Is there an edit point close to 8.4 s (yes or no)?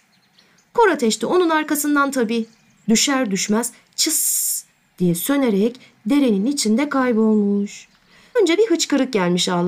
yes